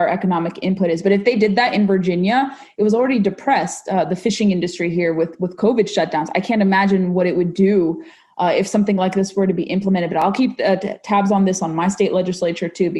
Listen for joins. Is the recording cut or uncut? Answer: uncut